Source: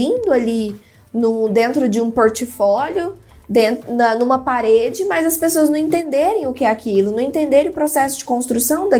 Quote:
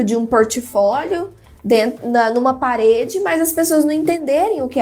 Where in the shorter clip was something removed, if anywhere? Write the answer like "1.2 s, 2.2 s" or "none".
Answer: none